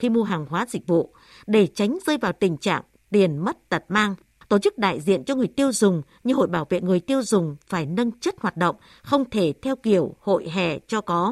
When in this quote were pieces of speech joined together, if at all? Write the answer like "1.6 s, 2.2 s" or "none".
4.4 s